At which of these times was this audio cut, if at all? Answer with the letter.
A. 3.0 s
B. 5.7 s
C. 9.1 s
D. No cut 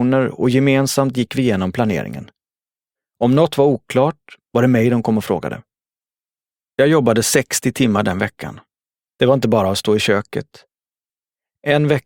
C